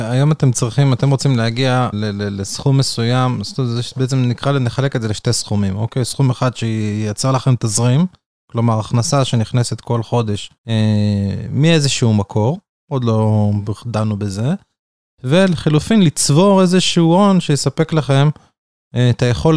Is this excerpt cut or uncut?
cut